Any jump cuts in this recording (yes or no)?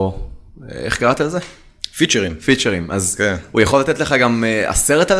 no